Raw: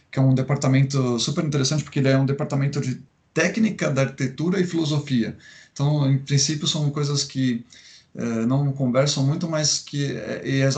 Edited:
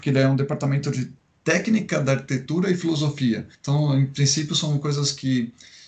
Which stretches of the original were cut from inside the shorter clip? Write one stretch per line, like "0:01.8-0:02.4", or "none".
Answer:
0:05.4-0:05.7